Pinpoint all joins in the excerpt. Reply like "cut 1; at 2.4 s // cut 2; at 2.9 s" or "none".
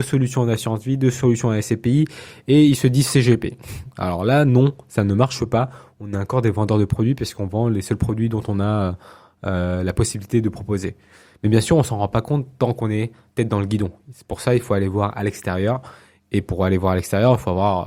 none